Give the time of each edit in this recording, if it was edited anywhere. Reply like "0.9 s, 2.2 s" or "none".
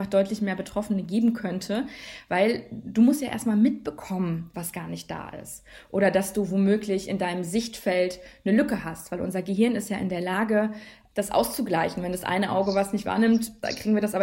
4.5 s